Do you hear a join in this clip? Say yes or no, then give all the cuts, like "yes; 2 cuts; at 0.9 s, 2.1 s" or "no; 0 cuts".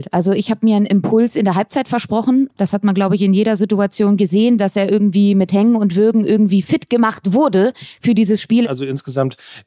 yes; 2 cuts; at 2.5 s, 8.6 s